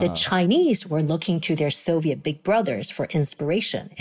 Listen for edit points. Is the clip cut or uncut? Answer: uncut